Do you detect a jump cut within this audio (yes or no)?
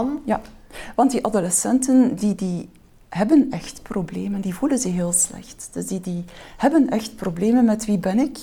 no